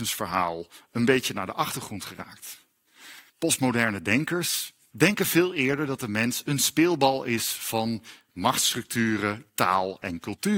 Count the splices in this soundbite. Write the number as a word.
two